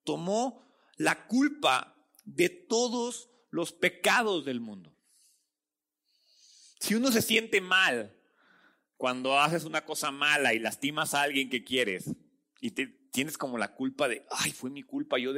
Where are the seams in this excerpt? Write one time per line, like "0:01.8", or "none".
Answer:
none